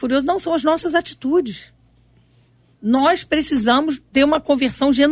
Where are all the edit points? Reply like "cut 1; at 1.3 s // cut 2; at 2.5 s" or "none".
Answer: none